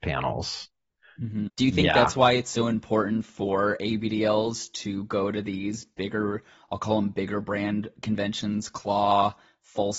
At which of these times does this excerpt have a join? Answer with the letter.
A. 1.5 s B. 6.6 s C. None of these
A